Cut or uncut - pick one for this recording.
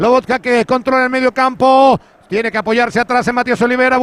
uncut